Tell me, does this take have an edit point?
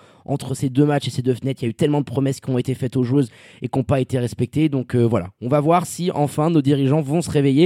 no; 0 cuts

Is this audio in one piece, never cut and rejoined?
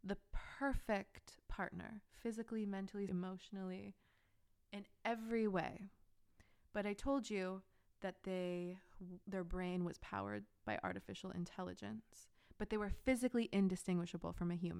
no; 2 cuts; at 3.1 s, 9.2 s

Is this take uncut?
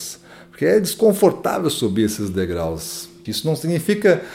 no; 1 cut; at 3.3 s

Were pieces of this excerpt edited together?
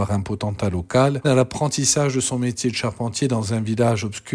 yes; 1 cut; at 1.2 s

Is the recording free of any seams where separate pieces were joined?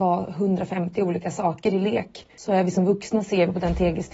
yes; 0 cuts

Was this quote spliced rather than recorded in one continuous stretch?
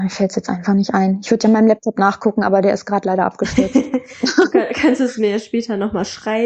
no; 0 cuts

